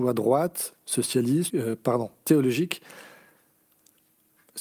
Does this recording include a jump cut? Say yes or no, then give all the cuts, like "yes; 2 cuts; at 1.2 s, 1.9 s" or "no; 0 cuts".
yes; 1 cut; at 1.5 s